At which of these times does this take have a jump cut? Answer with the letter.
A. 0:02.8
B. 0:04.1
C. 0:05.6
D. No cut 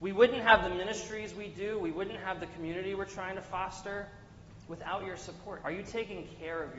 C